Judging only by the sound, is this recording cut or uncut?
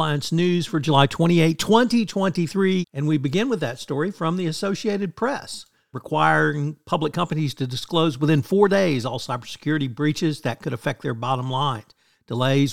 cut